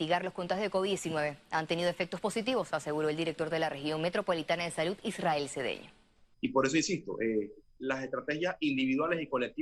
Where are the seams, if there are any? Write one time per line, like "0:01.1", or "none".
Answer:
0:06.3
0:07.8